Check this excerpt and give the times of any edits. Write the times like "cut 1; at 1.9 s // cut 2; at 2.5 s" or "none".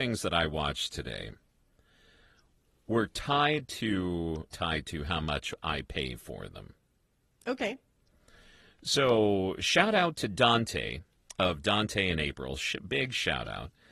cut 1; at 4.5 s